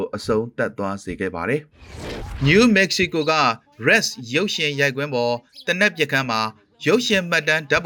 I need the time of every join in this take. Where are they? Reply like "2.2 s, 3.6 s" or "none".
1.7 s